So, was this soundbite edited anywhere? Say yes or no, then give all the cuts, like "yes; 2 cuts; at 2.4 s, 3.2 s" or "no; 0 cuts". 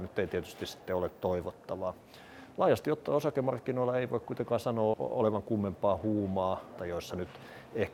yes; 2 cuts; at 4.9 s, 6.8 s